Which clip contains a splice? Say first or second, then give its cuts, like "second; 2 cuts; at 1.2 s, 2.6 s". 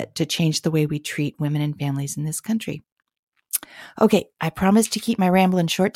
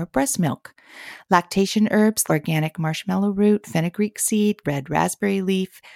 second; 2 cuts; at 2.3 s, 4.6 s